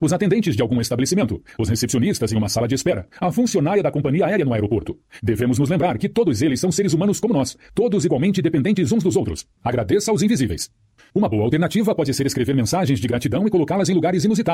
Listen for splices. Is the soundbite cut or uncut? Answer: cut